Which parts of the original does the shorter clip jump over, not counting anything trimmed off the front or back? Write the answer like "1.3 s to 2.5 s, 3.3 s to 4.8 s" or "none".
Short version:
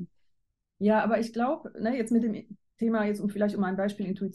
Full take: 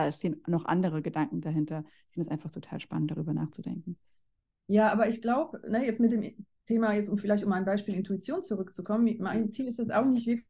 none